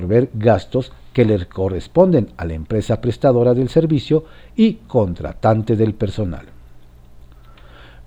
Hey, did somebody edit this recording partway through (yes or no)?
no